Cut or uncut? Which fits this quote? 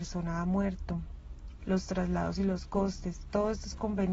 cut